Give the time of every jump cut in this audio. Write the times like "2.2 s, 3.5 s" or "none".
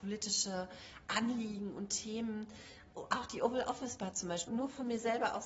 2.9 s, 4.5 s